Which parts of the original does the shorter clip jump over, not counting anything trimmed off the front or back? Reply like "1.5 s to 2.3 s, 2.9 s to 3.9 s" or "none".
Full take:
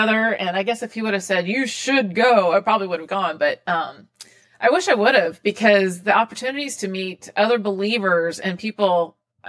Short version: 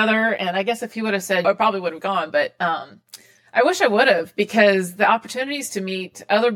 1.4 s to 2.5 s